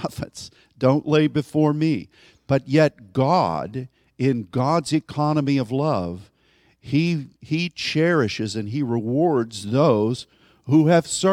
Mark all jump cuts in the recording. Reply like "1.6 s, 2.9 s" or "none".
2.3 s